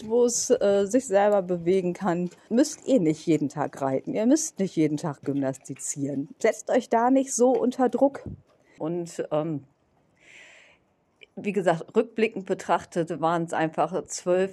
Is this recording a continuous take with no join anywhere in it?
no; 2 cuts; at 2.5 s, 8.8 s

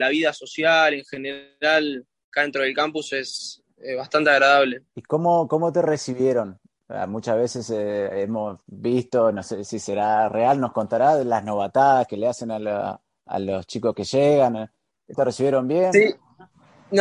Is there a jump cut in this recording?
yes; 2 cuts; at 4.9 s, 15.1 s

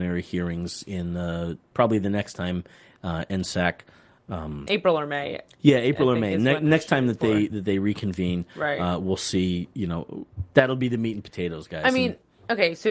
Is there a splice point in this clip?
no; 0 cuts

